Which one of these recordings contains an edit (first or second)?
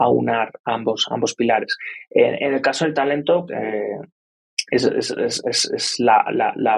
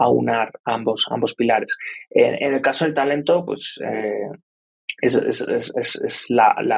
first